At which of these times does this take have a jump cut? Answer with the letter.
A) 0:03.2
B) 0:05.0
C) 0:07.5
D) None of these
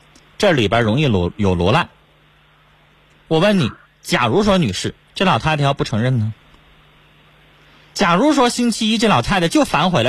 B